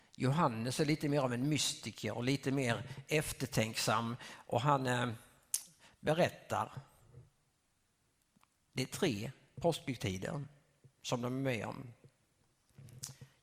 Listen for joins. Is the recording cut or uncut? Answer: uncut